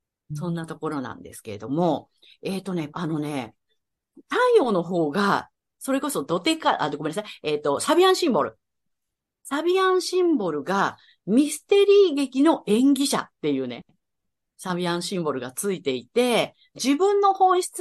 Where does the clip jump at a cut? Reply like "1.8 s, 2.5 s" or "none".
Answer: 2.9 s, 16.7 s